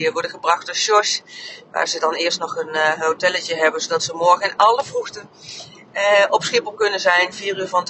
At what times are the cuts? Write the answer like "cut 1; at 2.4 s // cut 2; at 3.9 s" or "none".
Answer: none